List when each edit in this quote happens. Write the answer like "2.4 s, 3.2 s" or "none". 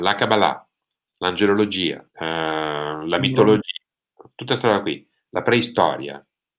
2.1 s